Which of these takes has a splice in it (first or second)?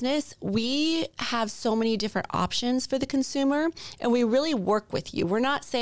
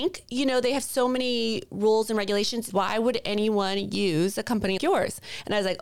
second